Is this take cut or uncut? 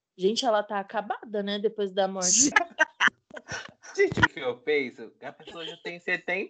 cut